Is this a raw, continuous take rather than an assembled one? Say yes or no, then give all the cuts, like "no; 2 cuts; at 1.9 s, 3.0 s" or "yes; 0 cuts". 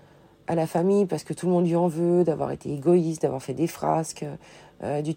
yes; 0 cuts